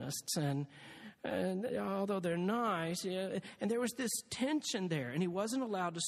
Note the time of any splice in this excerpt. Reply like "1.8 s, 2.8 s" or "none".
none